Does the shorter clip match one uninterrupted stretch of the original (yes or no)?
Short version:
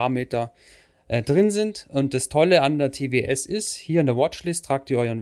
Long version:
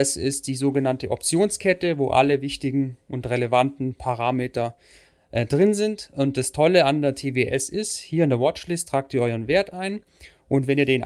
yes